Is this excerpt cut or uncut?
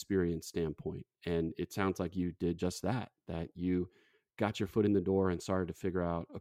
uncut